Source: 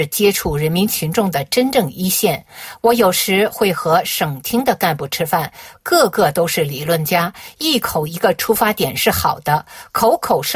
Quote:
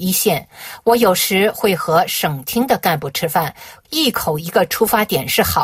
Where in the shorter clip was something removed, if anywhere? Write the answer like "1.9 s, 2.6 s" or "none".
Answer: 3.8 s